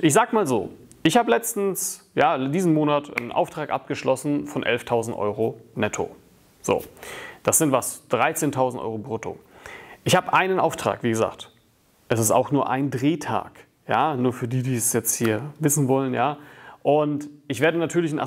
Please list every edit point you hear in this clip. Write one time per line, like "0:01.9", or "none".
0:03.2